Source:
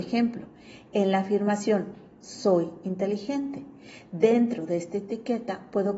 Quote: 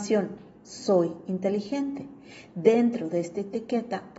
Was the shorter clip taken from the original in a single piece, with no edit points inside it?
yes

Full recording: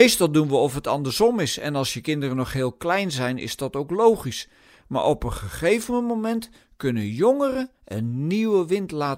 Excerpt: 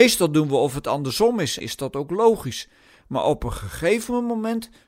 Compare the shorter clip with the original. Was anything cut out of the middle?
yes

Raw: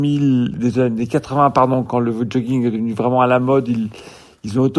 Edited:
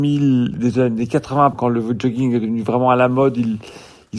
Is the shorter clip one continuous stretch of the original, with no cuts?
no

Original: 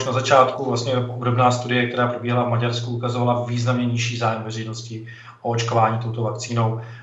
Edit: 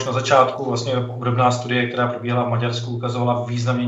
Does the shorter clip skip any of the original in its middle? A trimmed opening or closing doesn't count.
no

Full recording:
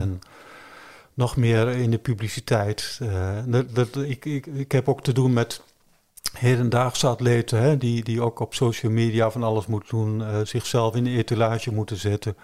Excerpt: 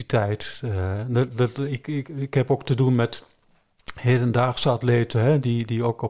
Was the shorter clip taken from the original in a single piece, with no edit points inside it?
yes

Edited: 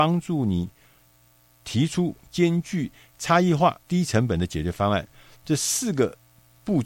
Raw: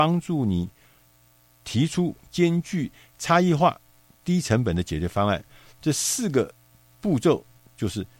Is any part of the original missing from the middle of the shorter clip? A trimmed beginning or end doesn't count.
yes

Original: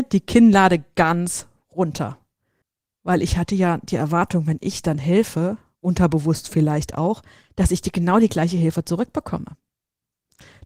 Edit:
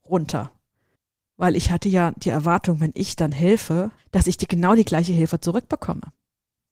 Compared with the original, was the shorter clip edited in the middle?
yes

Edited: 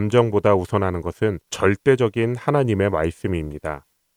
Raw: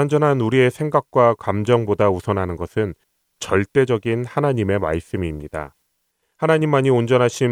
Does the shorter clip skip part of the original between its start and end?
yes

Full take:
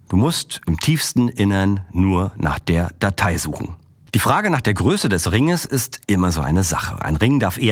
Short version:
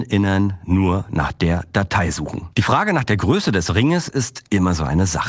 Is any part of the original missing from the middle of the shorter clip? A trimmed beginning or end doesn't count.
yes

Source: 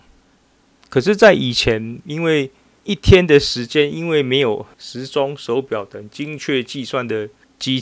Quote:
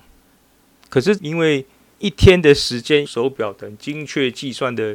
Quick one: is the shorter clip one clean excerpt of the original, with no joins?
no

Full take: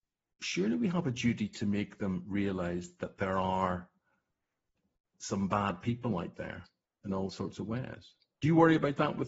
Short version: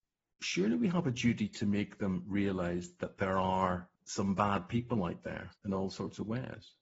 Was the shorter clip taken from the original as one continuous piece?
no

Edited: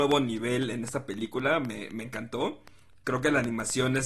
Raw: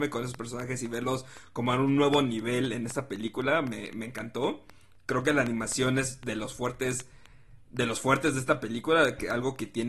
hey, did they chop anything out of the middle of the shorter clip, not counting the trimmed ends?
no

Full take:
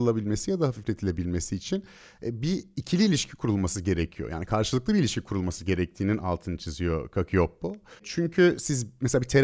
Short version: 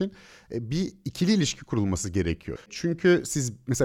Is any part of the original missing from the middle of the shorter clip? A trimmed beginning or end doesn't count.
yes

